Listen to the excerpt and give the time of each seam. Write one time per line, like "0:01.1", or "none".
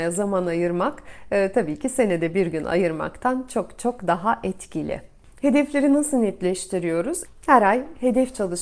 0:07.3

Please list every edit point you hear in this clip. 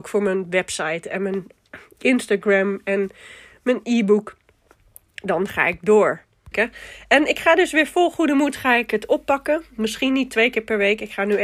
0:06.5

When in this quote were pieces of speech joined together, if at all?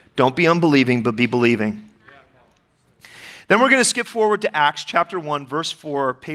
none

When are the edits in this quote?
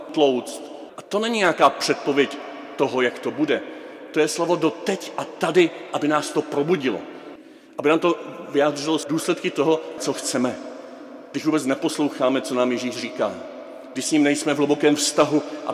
0:00.9
0:10.0

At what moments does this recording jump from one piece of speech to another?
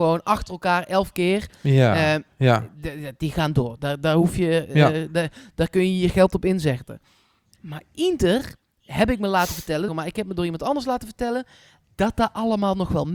0:09.9

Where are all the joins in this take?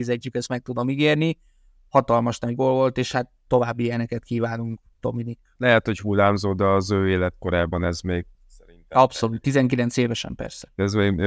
0:05.6
0:08.3

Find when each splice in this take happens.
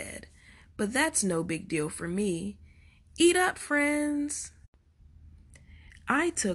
none

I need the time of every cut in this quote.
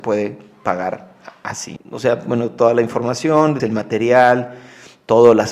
0:01.8
0:03.6

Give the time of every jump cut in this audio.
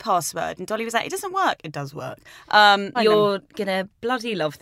0:02.9

